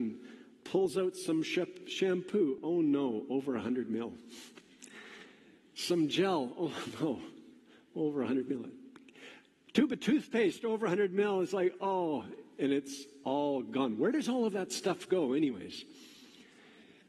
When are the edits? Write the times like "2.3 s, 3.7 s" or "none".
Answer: none